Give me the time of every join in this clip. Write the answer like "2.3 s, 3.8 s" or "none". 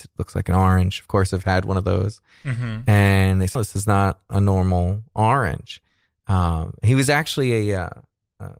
3.6 s